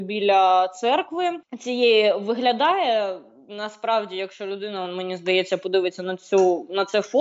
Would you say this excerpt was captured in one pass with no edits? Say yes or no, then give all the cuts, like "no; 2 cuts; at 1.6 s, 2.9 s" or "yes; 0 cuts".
yes; 0 cuts